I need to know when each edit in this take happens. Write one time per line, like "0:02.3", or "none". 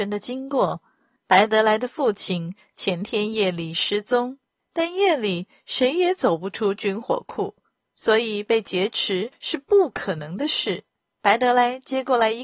0:11.1